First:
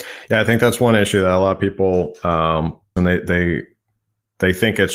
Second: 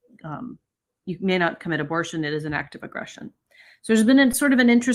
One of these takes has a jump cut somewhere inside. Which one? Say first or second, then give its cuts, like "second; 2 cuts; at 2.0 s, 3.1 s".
first; 1 cut; at 3.0 s